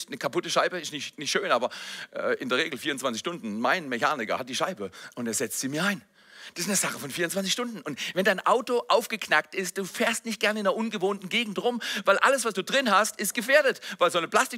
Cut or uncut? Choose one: uncut